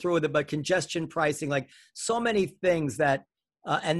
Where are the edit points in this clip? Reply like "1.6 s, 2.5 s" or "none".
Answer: none